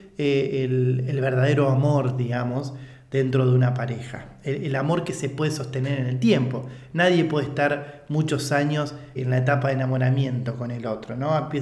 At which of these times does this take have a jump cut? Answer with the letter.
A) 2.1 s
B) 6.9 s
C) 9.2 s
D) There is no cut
C